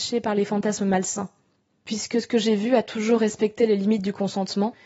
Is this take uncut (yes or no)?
yes